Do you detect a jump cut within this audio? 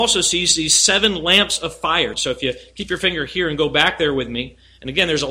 yes; 1 cut; at 2.1 s

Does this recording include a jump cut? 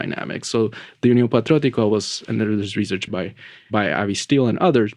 yes; 1 cut; at 3.1 s

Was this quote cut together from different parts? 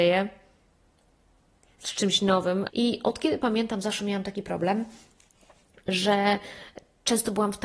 yes; 1 cut; at 2.7 s

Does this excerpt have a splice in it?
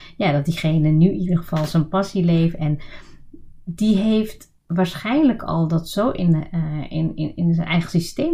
no; 0 cuts

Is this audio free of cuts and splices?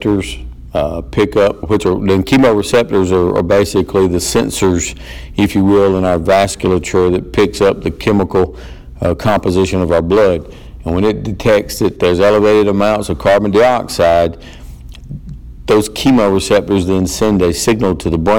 no; 1 cut; at 1.6 s

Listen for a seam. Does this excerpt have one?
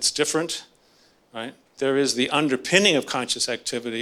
yes; 1 cut; at 1.6 s

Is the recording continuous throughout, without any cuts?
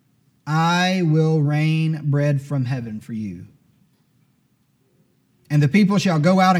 yes; 0 cuts

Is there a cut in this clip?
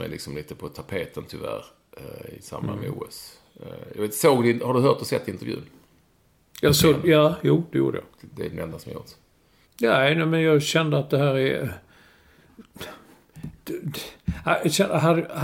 yes; 1 cut; at 9.7 s

